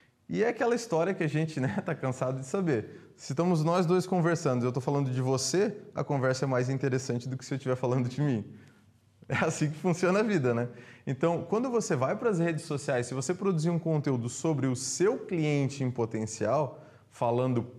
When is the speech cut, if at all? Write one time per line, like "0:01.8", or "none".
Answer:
none